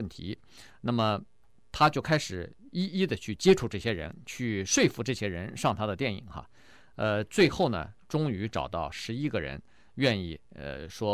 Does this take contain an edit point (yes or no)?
no